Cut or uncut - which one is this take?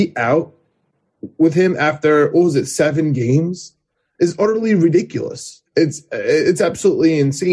cut